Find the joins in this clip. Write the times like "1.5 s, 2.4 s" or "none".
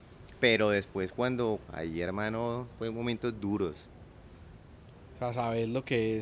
1.6 s